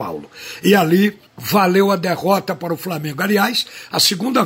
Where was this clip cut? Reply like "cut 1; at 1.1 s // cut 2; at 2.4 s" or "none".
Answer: cut 1; at 1.3 s